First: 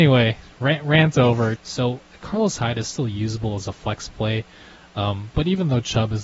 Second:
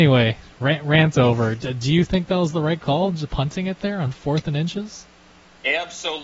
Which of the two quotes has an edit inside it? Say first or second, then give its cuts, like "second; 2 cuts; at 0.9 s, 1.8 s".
first; 1 cut; at 1.6 s